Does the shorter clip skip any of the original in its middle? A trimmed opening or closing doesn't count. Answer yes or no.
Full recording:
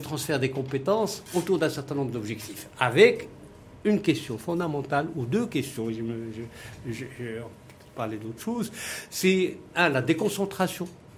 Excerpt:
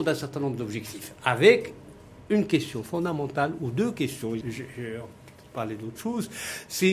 yes